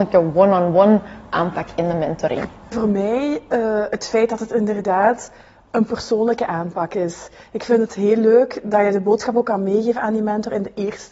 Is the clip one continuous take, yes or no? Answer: yes